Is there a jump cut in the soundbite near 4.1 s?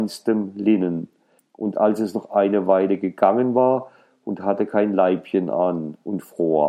yes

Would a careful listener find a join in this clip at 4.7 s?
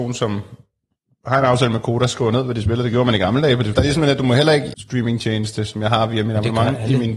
yes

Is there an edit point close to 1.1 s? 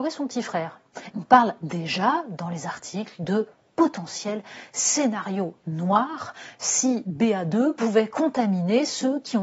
yes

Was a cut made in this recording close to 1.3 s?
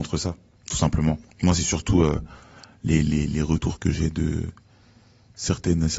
yes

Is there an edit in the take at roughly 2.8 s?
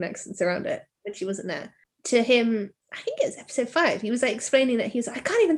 yes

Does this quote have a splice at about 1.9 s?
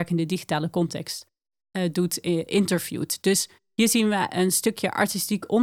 no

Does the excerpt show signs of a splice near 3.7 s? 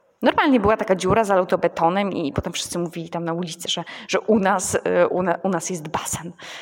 no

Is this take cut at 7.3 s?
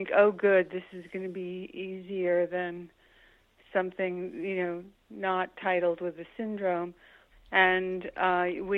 yes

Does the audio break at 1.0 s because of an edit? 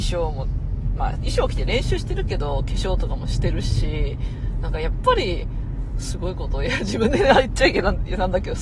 yes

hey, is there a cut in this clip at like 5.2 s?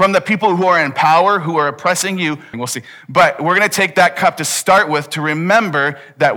no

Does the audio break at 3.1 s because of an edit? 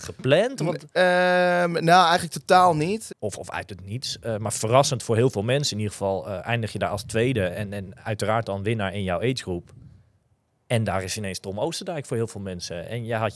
yes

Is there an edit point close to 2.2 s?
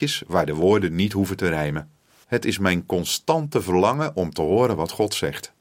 yes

